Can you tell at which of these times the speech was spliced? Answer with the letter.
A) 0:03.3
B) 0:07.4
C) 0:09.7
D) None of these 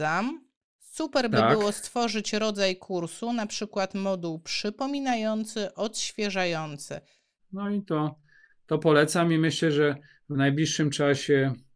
B